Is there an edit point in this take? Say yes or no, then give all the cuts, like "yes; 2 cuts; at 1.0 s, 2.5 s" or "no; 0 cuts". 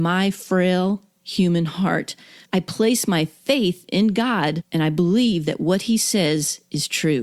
yes; 1 cut; at 2.4 s